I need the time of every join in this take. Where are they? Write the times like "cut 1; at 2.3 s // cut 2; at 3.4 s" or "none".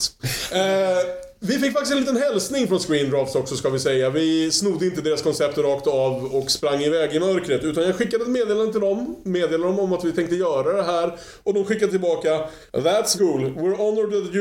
cut 1; at 13.2 s